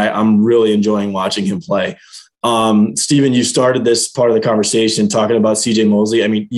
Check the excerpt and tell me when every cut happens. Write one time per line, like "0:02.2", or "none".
none